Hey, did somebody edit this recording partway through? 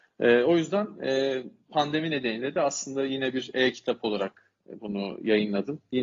no; 0 cuts

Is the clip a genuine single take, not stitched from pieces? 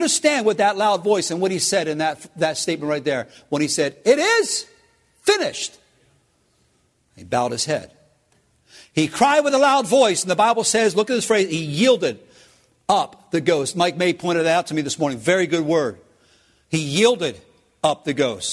yes; 0 cuts

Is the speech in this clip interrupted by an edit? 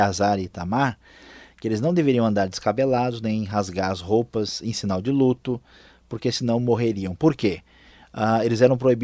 no; 0 cuts

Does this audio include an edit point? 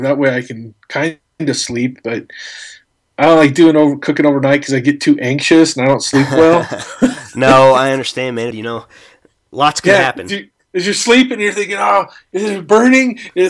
yes; 1 cut; at 8.5 s

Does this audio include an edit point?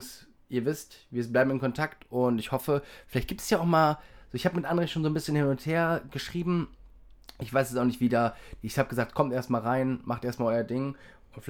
no; 0 cuts

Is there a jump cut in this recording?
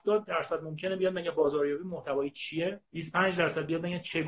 yes; 1 cut; at 2.8 s

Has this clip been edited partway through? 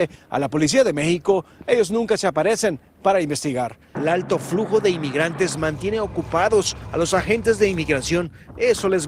yes; 1 cut; at 4.0 s

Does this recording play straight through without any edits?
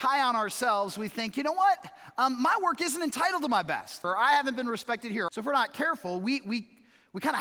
no; 2 cuts; at 4.0 s, 5.3 s

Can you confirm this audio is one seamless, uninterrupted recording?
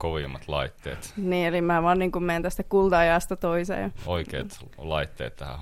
no; 1 cut; at 4.0 s

